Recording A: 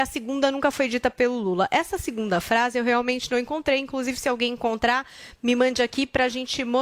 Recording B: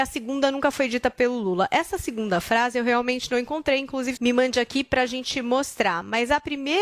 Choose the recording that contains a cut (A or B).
B